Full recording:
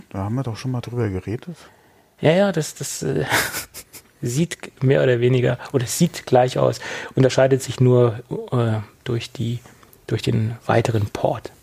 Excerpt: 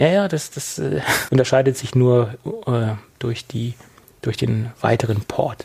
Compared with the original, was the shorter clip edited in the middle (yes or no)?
yes